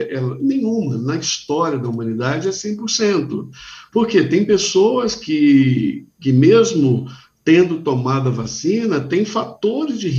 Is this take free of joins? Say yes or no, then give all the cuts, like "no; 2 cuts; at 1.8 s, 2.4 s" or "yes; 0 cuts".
yes; 0 cuts